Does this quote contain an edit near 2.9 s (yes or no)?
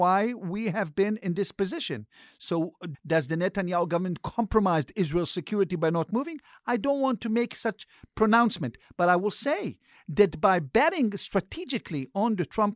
yes